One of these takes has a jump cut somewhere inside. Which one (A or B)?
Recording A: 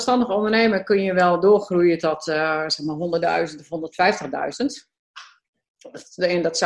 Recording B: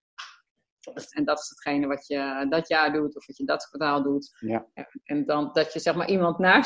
B